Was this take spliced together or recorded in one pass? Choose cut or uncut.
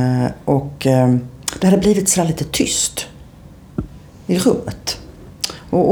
uncut